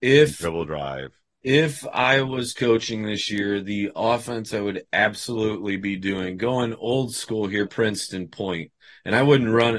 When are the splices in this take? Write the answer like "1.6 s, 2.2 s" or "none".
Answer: 7.7 s